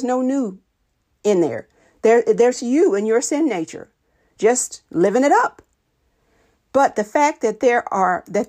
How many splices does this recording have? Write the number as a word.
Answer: one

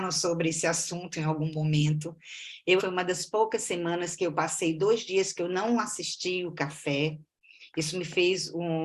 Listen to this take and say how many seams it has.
one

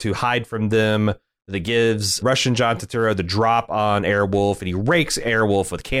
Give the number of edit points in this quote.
one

